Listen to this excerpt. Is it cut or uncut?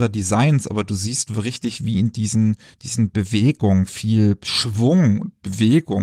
uncut